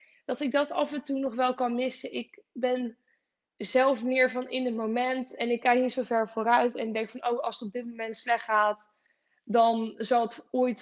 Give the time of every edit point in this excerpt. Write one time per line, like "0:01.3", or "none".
none